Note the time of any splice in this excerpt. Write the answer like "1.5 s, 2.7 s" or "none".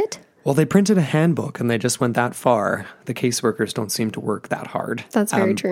none